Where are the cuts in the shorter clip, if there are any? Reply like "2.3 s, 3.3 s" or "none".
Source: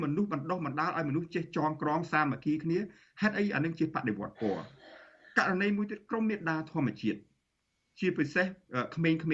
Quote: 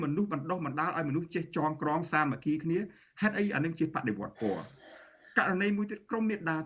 none